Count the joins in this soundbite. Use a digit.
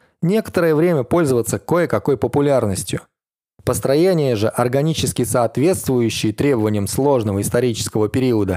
0